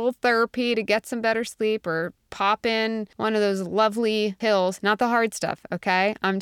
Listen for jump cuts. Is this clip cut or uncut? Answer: uncut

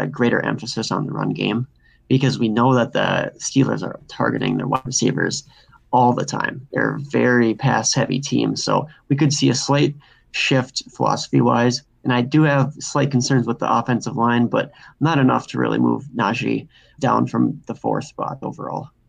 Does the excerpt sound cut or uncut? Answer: cut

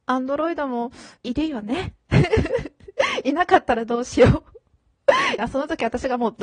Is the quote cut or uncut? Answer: cut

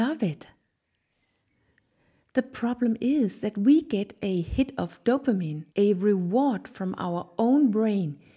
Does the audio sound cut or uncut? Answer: cut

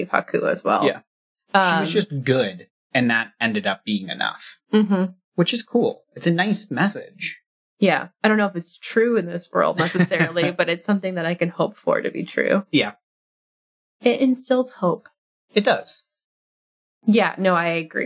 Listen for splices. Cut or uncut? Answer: uncut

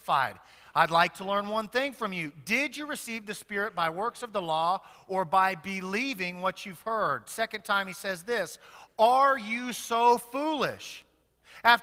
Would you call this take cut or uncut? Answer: uncut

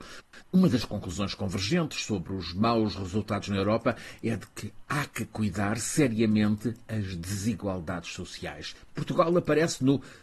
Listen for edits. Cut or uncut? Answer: cut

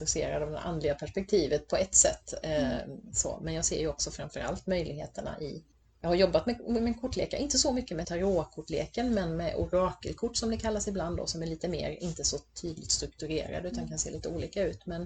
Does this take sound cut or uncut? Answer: cut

